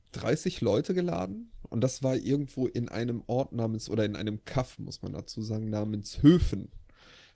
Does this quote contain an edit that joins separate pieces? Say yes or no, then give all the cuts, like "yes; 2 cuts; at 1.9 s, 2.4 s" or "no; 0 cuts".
no; 0 cuts